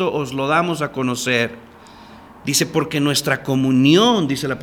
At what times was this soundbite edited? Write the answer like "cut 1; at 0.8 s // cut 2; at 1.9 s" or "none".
none